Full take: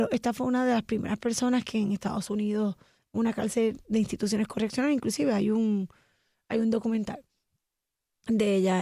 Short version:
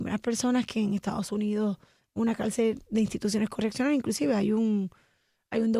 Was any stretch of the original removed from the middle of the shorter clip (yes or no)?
no